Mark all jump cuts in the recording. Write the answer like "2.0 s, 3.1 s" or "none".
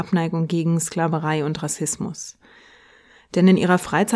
none